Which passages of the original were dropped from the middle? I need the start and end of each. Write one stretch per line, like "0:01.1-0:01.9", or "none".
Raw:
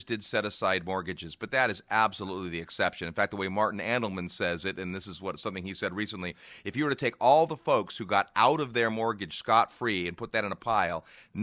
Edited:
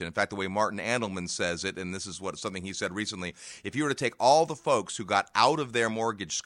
none